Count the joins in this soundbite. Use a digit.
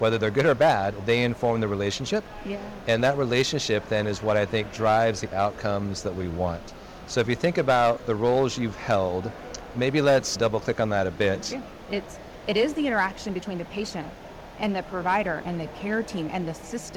1